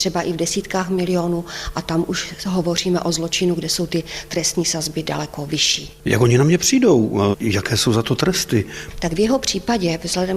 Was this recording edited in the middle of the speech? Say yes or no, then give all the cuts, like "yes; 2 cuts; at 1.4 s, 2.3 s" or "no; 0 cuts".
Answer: yes; 1 cut; at 7.3 s